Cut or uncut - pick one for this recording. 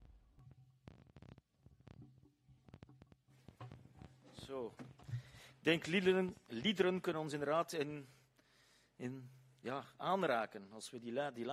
uncut